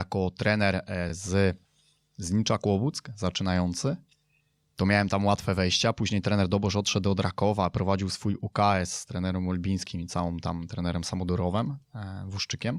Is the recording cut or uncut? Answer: uncut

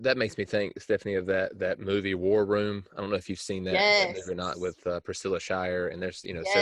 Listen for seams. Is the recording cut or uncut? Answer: uncut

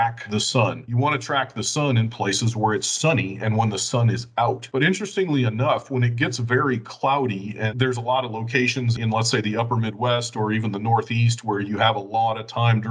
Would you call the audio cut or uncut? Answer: uncut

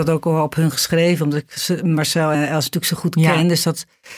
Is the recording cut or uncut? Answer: cut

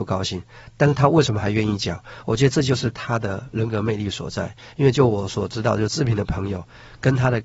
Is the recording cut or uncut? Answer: uncut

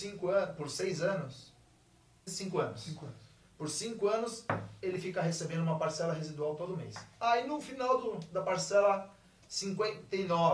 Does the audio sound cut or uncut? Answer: cut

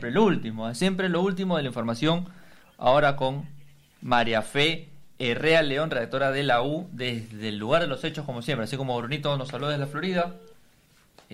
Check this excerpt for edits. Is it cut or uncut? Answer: uncut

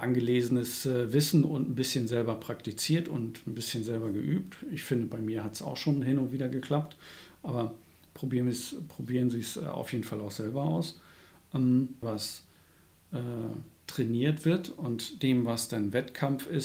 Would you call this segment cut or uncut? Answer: cut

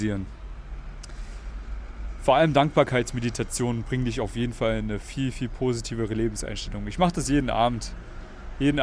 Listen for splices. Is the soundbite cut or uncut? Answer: uncut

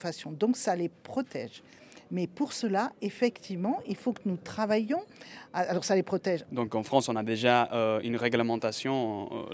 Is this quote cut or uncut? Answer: cut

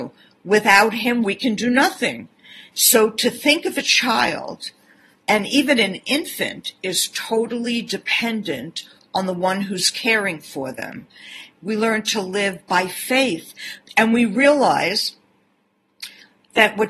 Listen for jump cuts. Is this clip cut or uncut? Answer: cut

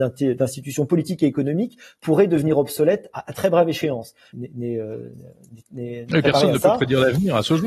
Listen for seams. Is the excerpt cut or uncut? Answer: cut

